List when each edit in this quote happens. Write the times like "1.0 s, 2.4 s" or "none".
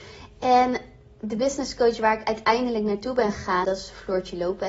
3.6 s

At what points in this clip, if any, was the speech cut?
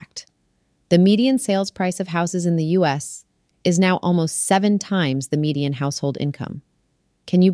none

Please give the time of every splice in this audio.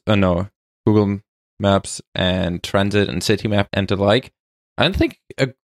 3.7 s

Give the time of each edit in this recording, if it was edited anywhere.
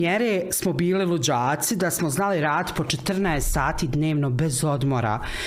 none

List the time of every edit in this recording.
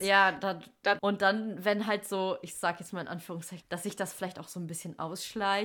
1.0 s, 3.6 s

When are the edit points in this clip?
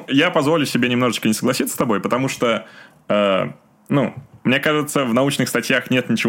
none

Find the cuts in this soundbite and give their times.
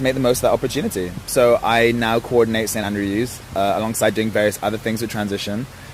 none

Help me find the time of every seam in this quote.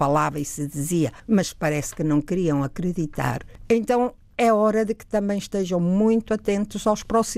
none

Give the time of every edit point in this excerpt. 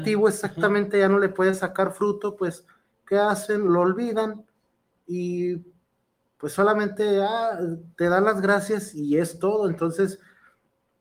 none

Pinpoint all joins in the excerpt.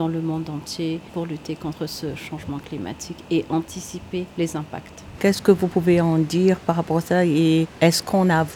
5.2 s

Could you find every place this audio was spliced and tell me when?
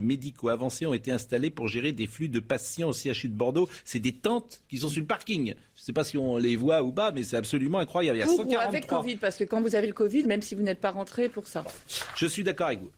10.2 s

